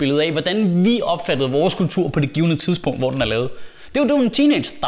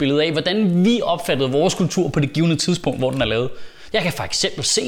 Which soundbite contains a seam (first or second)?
second